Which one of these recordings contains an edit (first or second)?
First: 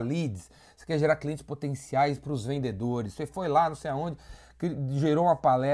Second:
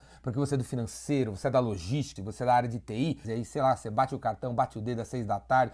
second